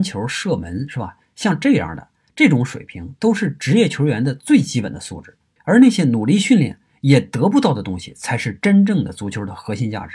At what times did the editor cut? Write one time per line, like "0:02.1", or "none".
0:05.6